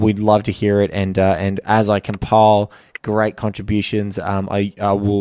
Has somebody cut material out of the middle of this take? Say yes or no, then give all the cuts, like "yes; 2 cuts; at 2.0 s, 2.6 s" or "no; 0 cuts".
no; 0 cuts